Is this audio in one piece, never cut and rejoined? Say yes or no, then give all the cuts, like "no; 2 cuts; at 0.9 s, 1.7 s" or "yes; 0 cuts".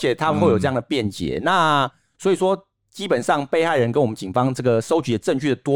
yes; 0 cuts